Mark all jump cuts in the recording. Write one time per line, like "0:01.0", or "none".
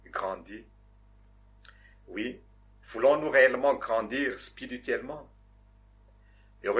0:01.9